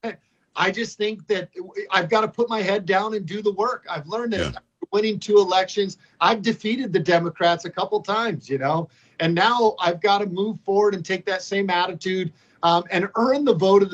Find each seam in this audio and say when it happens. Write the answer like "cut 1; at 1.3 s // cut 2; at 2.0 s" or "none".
none